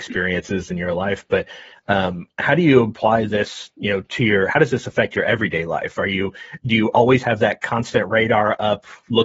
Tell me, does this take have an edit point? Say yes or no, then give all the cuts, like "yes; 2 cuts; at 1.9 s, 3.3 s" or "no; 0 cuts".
no; 0 cuts